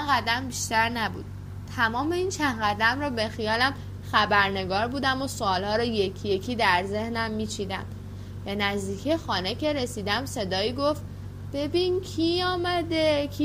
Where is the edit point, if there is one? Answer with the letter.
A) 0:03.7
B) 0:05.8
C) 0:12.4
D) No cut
D